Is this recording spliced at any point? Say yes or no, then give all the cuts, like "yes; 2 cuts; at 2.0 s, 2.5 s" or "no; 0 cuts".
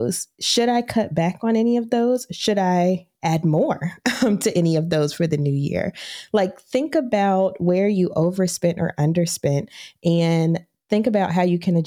no; 0 cuts